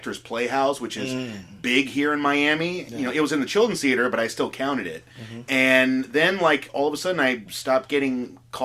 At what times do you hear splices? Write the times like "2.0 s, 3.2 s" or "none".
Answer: none